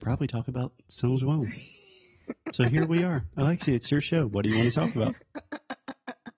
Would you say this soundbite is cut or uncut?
uncut